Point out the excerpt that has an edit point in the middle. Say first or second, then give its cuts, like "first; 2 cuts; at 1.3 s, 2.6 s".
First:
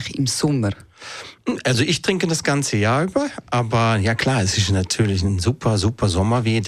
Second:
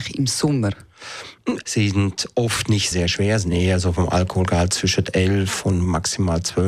second; 2 cuts; at 1.6 s, 2.9 s